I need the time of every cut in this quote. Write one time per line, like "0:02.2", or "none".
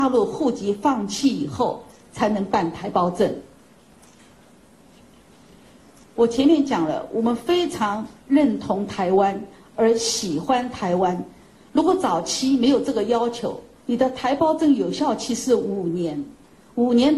0:06.0
0:11.6
0:13.8